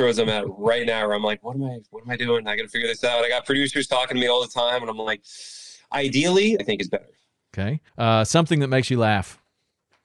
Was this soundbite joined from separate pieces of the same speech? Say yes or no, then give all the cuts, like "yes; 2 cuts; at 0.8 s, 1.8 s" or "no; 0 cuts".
yes; 2 cuts; at 6.6 s, 7.9 s